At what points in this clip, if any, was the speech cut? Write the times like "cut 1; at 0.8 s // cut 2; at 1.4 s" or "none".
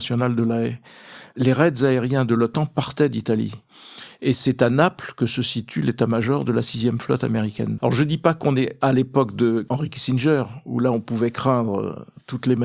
cut 1; at 7.8 s